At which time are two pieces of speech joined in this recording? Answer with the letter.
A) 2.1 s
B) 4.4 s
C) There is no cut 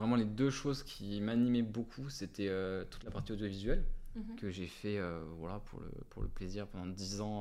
C